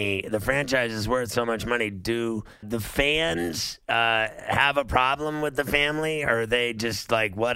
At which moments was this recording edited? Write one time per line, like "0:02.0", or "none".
0:02.6